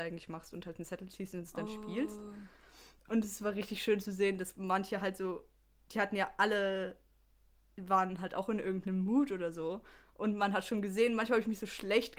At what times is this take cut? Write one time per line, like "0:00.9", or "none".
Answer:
none